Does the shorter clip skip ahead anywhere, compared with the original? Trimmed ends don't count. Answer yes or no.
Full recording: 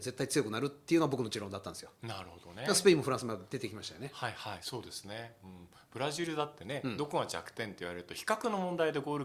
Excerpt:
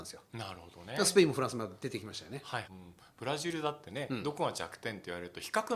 yes